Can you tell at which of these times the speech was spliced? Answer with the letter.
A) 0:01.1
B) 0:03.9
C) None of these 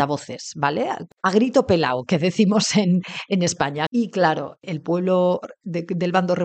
B